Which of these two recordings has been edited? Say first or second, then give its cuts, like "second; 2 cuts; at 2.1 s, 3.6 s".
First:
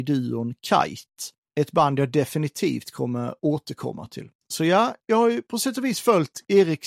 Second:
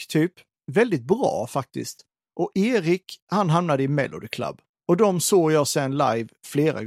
second; 1 cut; at 2.2 s